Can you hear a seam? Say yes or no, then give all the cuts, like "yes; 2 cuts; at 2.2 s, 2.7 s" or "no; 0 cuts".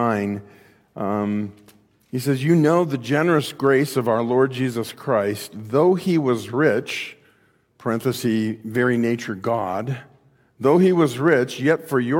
no; 0 cuts